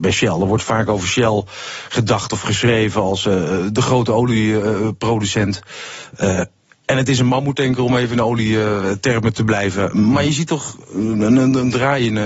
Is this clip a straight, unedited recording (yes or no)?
yes